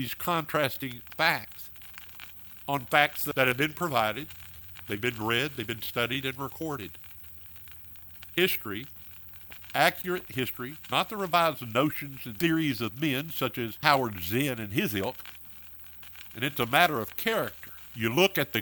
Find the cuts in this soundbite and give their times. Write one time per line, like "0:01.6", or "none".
0:10.9
0:16.3